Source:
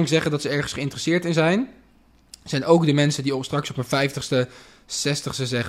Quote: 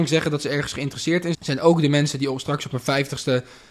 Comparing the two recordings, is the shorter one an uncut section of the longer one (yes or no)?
no